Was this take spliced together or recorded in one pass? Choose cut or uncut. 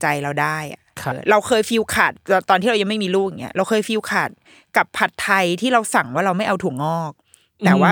cut